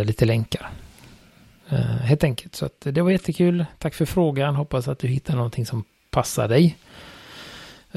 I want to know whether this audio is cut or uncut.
uncut